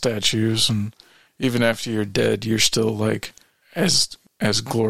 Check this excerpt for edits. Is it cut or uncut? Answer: uncut